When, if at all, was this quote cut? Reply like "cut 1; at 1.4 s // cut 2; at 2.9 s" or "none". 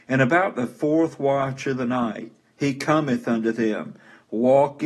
none